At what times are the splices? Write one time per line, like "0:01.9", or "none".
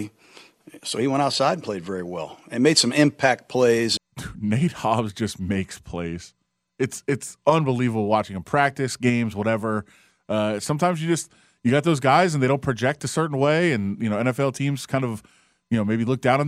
0:04.0